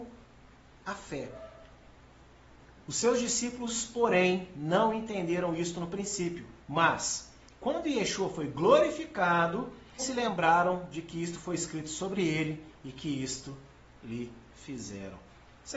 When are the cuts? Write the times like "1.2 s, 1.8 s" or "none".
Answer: 2.8 s, 6.6 s, 10.0 s